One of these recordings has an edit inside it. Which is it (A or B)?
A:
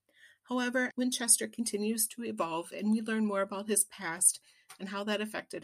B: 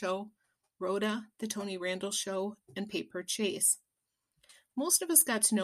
A